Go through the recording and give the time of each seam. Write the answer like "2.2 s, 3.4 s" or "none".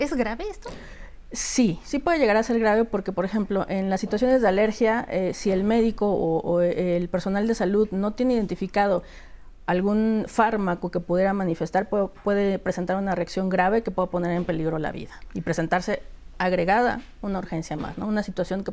none

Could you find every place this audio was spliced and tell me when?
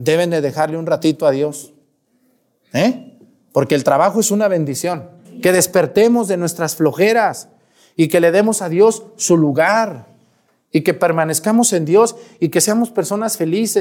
5.2 s

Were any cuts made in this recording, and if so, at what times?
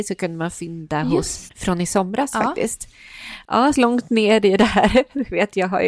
1.5 s, 3.7 s

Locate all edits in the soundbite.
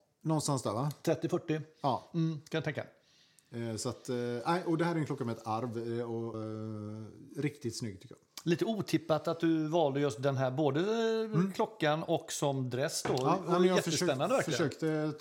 6.3 s

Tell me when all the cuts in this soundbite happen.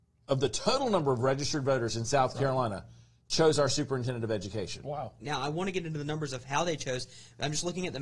5.2 s

